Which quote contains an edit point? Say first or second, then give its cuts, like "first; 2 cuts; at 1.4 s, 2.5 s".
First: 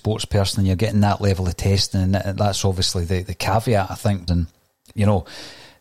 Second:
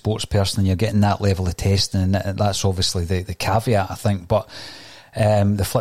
first; 1 cut; at 4.3 s